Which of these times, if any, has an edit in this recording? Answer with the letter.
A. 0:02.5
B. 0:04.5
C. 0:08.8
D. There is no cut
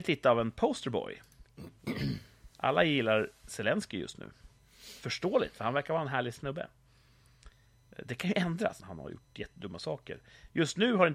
C